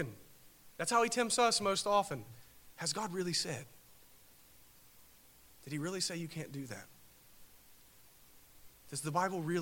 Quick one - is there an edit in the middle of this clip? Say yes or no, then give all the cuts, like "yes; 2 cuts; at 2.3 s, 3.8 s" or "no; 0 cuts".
no; 0 cuts